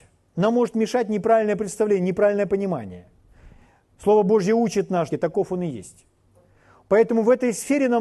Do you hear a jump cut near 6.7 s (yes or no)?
no